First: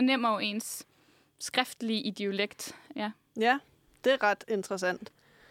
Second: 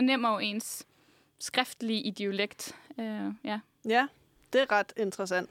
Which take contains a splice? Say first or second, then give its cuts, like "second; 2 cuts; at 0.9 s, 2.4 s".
first; 1 cut; at 2.9 s